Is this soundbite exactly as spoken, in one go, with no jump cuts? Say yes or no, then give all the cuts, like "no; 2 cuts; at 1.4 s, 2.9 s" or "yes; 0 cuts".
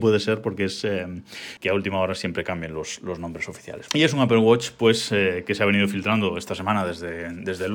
no; 2 cuts; at 1.6 s, 3.9 s